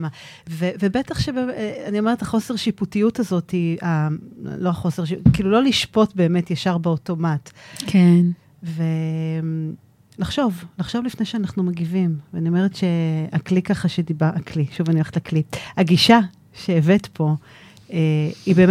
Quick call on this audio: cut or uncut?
uncut